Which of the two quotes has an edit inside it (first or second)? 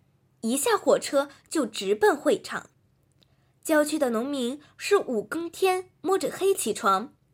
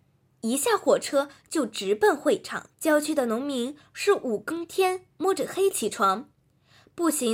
second